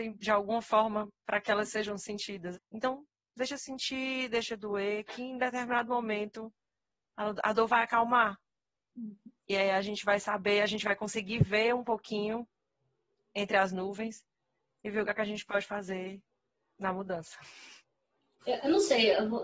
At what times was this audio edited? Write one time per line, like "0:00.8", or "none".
0:02.5
0:18.4